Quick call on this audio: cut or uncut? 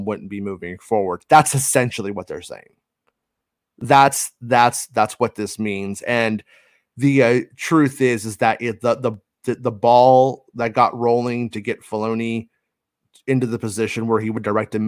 uncut